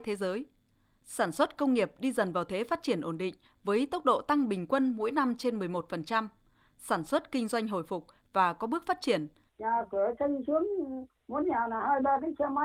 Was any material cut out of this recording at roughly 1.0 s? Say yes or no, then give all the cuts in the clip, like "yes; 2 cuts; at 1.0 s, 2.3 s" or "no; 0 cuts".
no; 2 cuts; at 9.5 s, 11.1 s